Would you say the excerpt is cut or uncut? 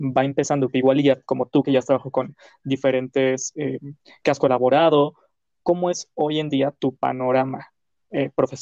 cut